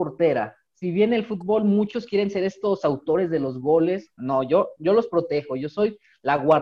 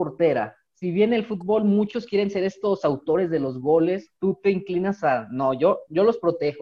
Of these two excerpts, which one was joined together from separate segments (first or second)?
first